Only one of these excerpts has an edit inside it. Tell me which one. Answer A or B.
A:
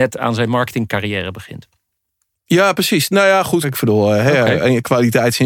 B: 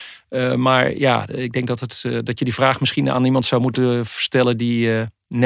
A